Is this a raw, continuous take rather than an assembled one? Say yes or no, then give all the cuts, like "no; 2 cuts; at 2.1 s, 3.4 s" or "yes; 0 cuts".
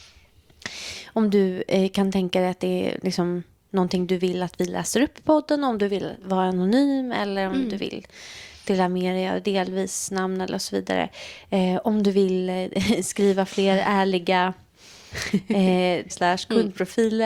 no; 1 cut; at 16.1 s